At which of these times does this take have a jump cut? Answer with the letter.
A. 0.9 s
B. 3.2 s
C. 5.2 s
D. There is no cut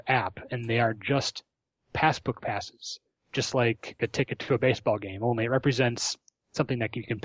D